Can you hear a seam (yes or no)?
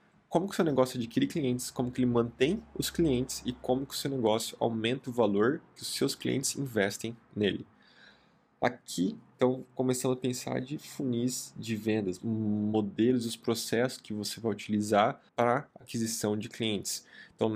yes